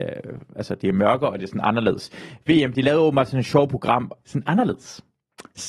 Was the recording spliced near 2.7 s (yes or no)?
no